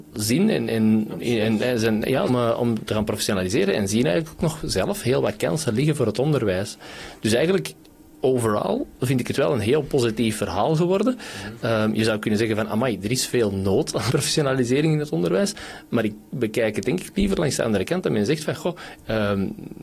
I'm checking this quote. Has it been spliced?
yes; 2 cuts; at 2.3 s, 14.1 s

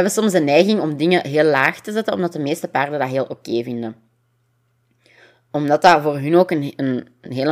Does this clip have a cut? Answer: no; 0 cuts

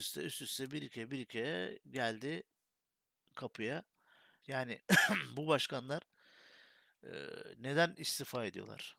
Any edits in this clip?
yes; 1 cut; at 4.4 s

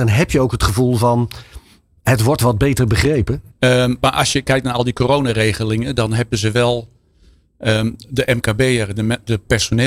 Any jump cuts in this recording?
yes; 1 cut; at 3.5 s

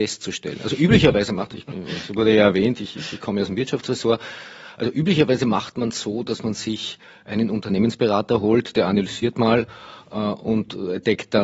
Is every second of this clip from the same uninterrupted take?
yes; 0 cuts

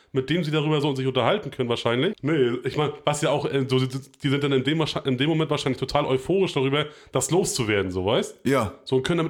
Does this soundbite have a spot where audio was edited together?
yes; 1 cut; at 2.1 s

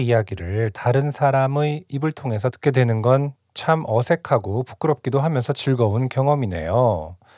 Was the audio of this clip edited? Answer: no; 0 cuts

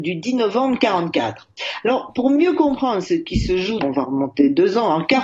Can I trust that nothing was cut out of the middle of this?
no; 1 cut; at 3.8 s

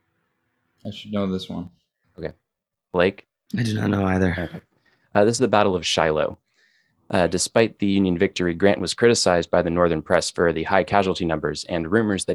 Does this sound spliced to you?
yes; 2 cuts; at 2.0 s, 3.5 s

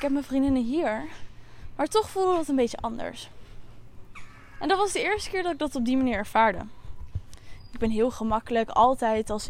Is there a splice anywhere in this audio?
no; 0 cuts

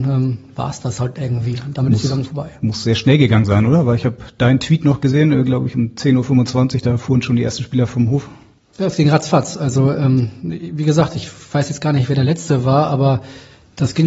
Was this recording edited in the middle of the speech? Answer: no; 0 cuts

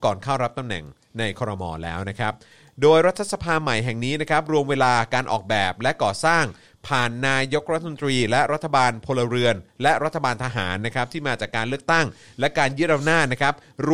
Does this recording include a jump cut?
no; 0 cuts

